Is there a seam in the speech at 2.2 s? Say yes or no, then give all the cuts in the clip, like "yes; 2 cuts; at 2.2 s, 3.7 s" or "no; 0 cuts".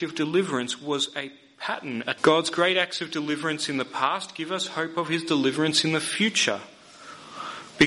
yes; 1 cut; at 2.2 s